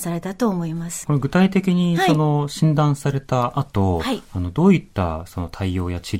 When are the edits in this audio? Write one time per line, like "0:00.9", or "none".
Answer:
0:01.0